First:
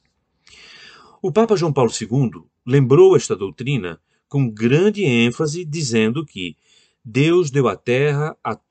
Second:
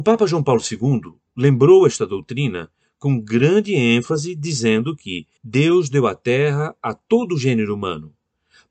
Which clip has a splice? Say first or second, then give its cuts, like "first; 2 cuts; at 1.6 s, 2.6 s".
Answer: second; 1 cut; at 5.4 s